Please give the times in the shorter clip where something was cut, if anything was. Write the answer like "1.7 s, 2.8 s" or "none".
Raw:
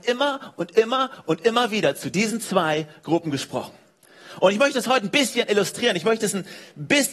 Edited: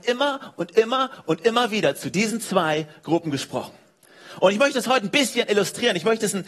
none